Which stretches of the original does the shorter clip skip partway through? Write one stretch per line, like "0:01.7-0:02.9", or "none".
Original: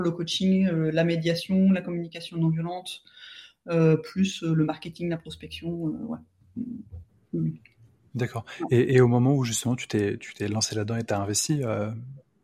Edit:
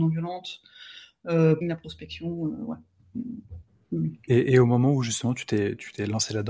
0:04.0-0:05.0
0:07.7-0:08.7